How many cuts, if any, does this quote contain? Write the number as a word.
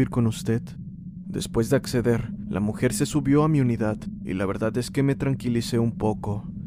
one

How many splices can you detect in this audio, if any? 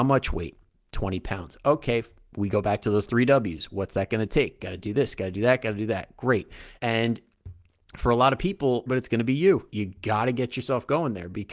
two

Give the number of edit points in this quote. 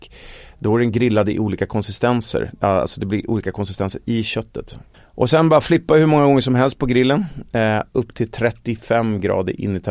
one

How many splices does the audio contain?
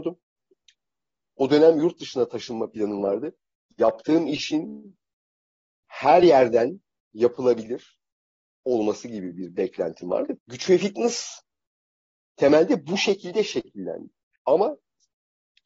two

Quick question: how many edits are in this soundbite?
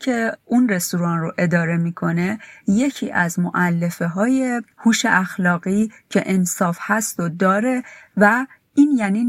zero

